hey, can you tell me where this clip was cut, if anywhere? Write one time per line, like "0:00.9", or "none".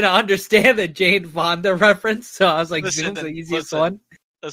0:03.1